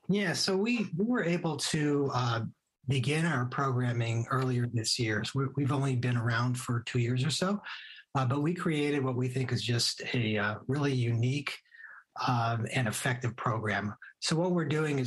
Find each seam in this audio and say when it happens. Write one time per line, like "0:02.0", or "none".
none